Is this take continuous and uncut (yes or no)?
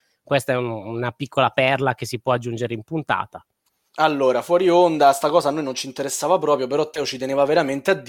yes